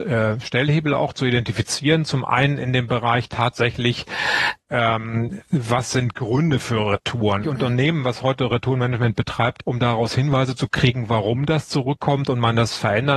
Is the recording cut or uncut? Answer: cut